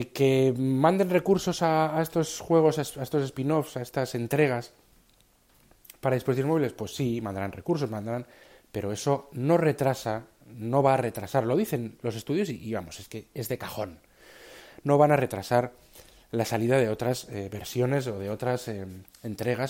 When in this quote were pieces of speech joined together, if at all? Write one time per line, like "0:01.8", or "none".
none

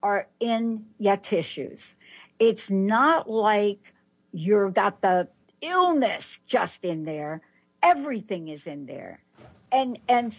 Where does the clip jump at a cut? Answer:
none

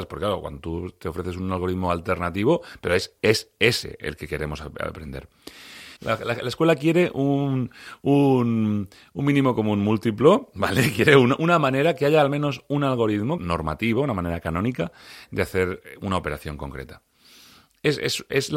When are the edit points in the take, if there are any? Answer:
0:06.0
0:13.4

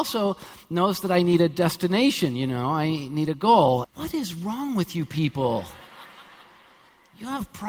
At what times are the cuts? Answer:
0:03.8

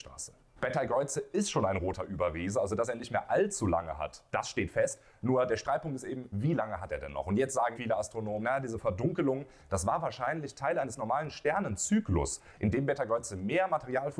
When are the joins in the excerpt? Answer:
0:07.7

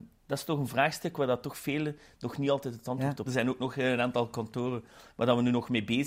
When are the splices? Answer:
0:03.3

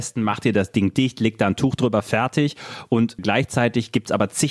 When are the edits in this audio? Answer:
0:03.2

